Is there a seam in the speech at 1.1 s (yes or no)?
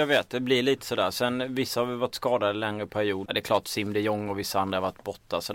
no